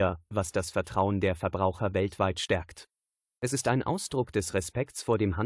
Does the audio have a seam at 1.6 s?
no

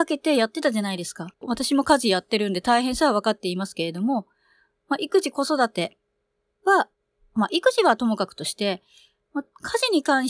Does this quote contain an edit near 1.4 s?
yes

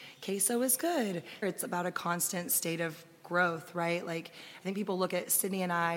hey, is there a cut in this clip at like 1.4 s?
yes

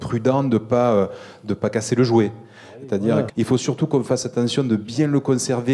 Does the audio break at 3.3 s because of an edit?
yes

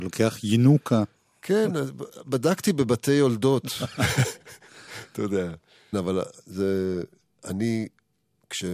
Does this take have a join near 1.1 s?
no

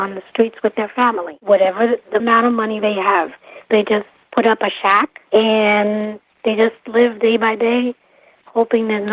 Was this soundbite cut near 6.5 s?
no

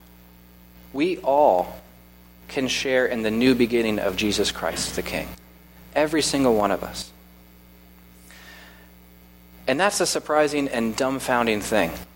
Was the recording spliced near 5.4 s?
no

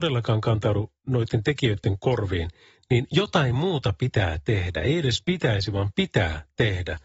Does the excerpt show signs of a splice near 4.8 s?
no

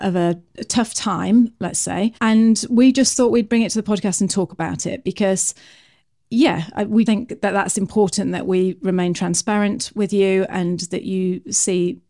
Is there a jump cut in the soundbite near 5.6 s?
no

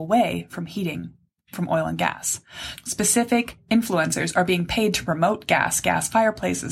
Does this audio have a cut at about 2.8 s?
yes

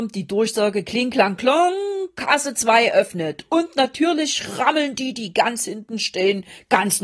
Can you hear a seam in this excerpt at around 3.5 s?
no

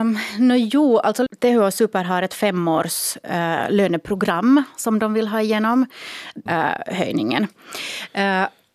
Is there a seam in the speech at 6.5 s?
yes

